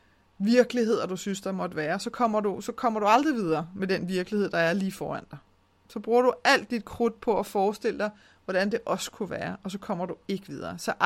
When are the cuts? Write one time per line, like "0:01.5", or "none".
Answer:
none